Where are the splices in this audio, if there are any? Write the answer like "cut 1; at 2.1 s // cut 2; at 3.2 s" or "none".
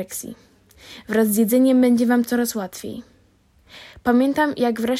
none